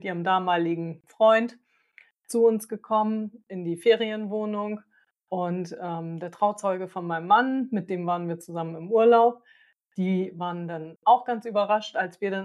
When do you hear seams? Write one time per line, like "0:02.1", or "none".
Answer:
none